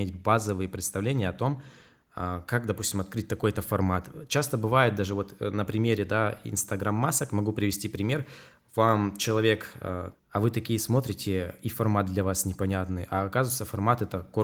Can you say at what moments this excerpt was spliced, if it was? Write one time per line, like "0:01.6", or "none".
0:10.1